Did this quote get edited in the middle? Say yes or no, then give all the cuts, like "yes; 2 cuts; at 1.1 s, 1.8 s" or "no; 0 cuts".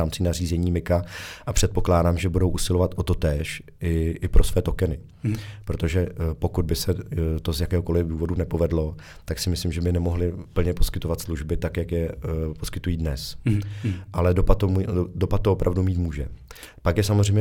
no; 0 cuts